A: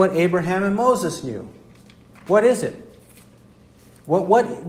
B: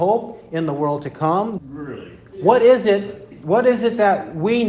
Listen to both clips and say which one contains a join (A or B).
B